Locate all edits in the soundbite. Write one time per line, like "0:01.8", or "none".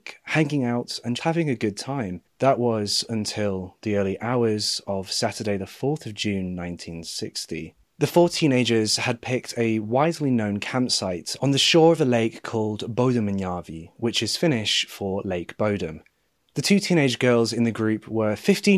0:01.2